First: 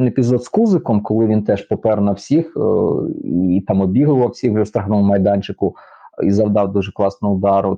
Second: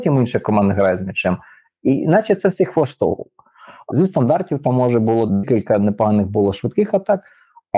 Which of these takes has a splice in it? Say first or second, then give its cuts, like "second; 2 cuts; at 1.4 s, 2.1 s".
second; 2 cuts; at 3.9 s, 5.3 s